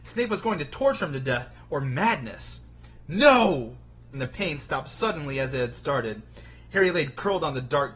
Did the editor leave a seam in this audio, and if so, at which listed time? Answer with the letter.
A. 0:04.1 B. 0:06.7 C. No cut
A